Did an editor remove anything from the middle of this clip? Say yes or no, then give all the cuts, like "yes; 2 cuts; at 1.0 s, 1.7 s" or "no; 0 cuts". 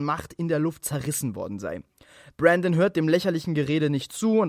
no; 0 cuts